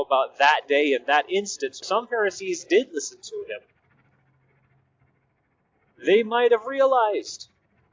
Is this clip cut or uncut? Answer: cut